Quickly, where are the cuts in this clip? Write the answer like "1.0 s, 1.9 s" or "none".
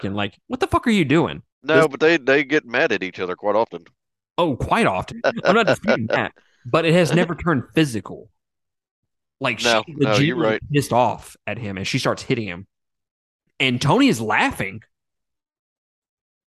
1.5 s, 5.1 s